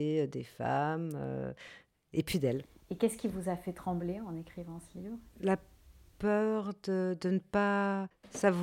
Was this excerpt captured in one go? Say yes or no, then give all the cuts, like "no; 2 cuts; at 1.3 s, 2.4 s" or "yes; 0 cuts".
no; 1 cut; at 5.3 s